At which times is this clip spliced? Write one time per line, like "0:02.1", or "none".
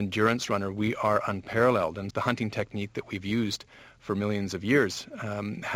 0:02.1